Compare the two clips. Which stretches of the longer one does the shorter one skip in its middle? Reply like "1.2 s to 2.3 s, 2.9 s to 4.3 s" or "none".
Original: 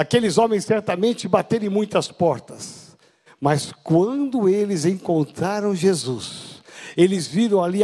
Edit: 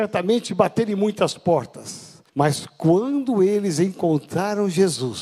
3.0 s to 3.3 s